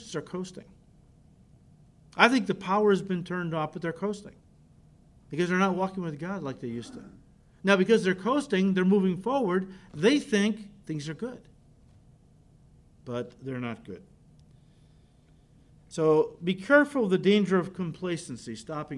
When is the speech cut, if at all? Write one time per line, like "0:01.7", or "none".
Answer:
none